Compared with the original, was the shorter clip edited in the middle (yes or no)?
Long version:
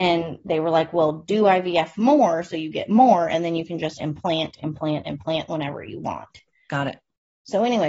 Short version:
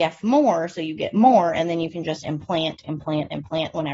no